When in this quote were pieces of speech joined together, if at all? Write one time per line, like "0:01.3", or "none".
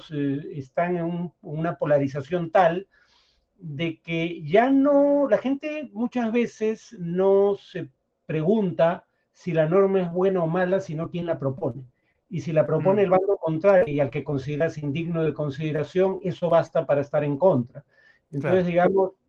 0:13.9

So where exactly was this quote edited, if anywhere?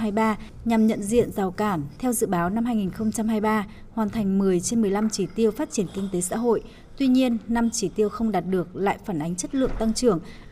0:01.9

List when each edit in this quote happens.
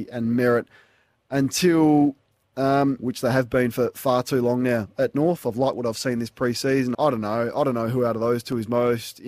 0:03.0
0:06.9

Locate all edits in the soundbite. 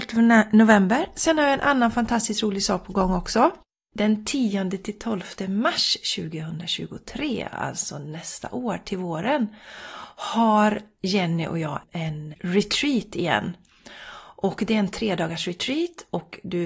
0:12.3

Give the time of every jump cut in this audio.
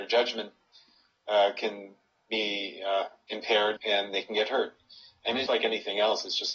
0:03.8
0:05.5

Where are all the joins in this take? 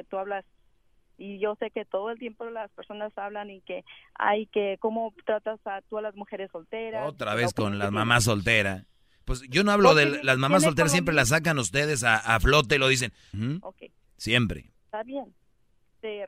0:13.3

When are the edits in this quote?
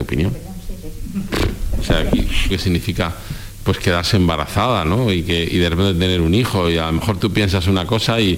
0:02.5

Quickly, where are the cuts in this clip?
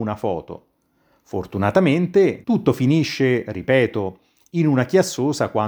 0:02.4

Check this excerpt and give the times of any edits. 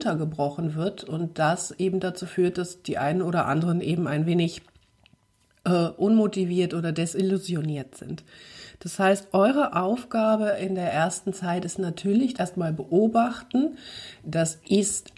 0:12.4

